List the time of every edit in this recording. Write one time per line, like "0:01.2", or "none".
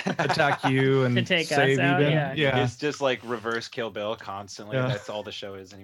none